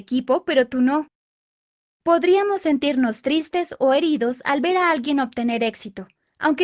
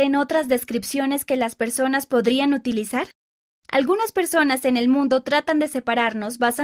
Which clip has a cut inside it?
first; 1 cut; at 1.8 s

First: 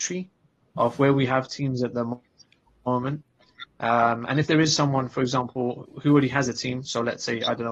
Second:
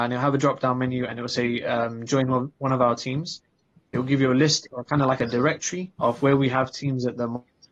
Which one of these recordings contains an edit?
second; 2 cuts; at 3.9 s, 5.9 s

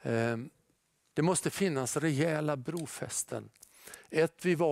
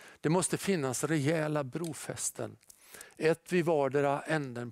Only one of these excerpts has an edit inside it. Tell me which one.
first; 1 cut; at 1.1 s

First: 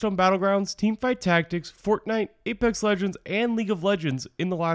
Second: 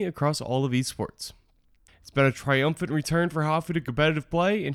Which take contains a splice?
second; 1 cut; at 1.9 s

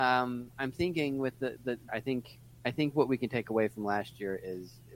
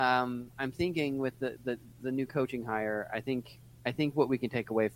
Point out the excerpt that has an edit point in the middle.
first; 1 cut; at 1.9 s

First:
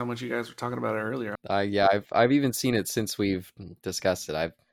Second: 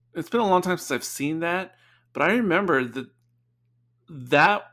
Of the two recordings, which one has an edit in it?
first; 1 cut; at 1.4 s

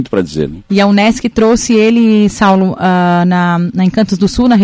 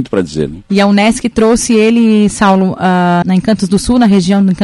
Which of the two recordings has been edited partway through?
second; 1 cut; at 3.2 s

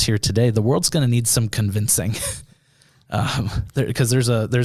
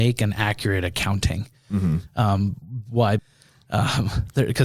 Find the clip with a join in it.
second; 1 cut; at 3.2 s

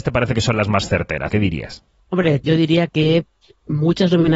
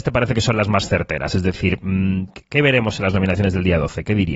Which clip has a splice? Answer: first; 2 cuts; at 1.3 s, 2.4 s

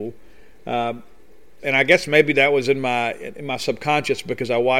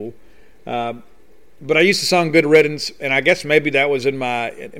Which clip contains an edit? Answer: first; 1 cut; at 1.6 s

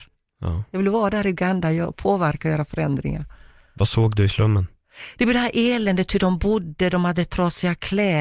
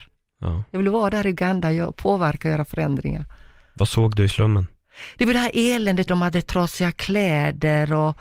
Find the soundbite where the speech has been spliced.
second; 1 cut; at 6.1 s

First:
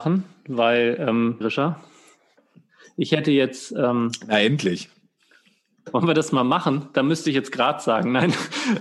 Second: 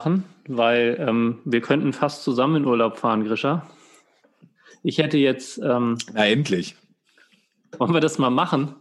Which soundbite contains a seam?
first; 1 cut; at 1.4 s

